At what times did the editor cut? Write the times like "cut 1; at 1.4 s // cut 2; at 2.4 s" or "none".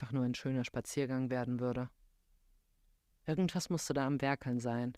cut 1; at 3.1 s